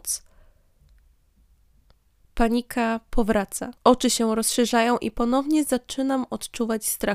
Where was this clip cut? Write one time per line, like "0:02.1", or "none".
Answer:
0:02.2
0:03.7